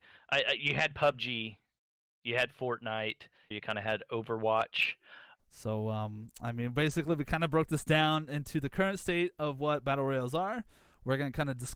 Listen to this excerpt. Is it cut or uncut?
cut